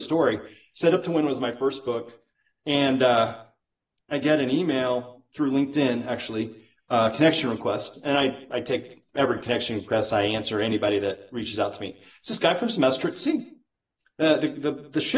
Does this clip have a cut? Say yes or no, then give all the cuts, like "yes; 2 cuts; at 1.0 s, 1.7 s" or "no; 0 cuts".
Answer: no; 0 cuts